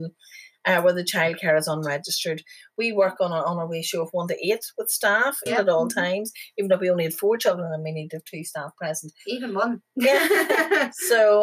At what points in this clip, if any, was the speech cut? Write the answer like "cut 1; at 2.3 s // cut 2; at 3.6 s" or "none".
cut 1; at 5.5 s